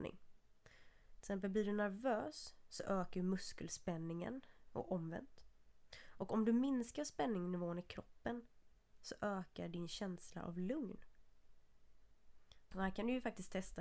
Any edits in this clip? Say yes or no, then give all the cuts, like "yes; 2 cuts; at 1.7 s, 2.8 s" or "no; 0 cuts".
yes; 1 cut; at 12.7 s